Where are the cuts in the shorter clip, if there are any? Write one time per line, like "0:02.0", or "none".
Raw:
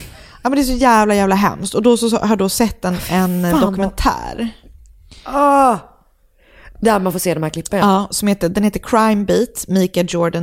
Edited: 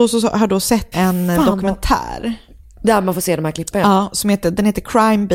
0:00.9
0:02.8

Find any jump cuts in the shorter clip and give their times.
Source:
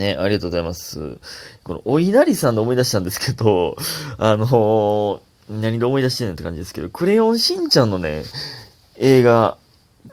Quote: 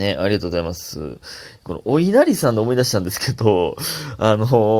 none

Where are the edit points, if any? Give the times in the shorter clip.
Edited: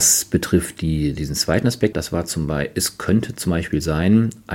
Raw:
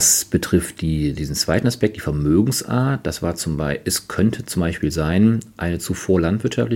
0:01.9

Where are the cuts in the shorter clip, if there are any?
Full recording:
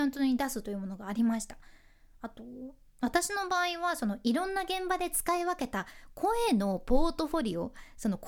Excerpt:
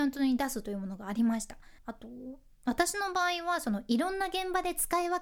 0:01.8

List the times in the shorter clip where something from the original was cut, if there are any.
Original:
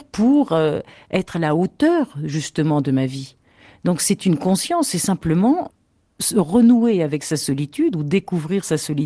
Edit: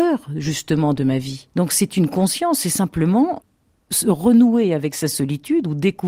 0:01.5

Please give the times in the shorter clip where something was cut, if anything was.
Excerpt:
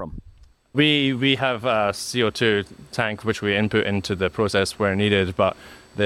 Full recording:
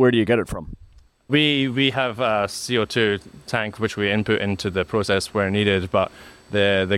none

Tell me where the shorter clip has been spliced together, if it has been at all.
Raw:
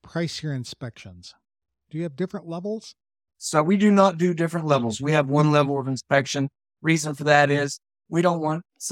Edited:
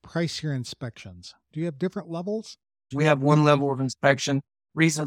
0:01.4
0:02.9

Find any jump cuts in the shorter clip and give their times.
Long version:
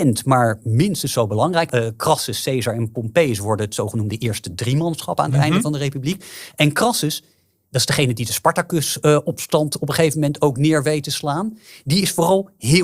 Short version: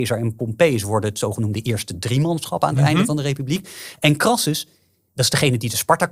none

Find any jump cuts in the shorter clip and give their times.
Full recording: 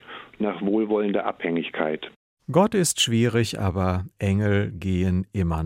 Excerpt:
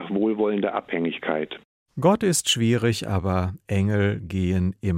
none

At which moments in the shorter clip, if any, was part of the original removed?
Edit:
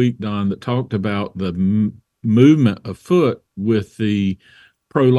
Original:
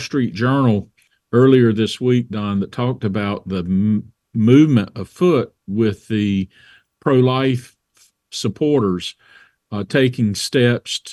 none

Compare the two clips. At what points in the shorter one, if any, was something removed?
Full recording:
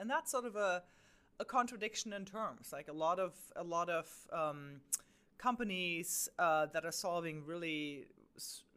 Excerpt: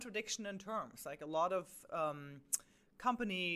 0:01.9

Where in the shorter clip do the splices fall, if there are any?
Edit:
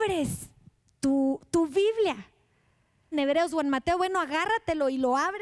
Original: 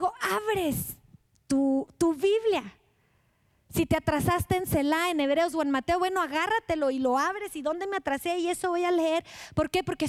0:03.1

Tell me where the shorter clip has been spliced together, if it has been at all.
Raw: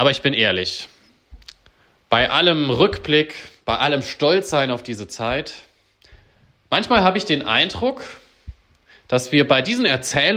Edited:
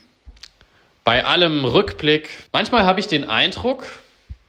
0:02.5

